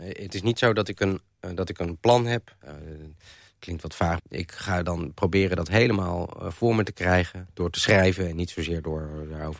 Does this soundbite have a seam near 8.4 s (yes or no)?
no